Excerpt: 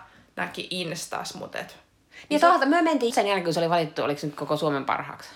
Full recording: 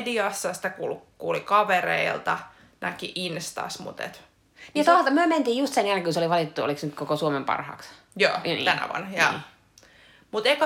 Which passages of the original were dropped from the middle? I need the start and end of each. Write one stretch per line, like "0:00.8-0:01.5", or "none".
0:05.5-0:05.7